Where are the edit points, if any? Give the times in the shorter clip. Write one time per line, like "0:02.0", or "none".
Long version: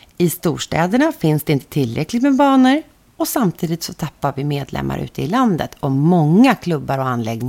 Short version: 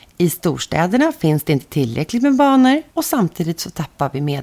0:02.9